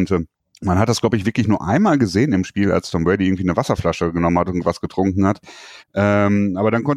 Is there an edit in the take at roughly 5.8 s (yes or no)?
yes